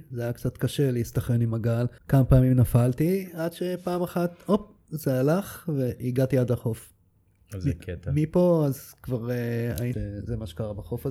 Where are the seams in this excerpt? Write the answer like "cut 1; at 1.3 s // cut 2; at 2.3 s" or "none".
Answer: cut 1; at 2.0 s // cut 2; at 9.9 s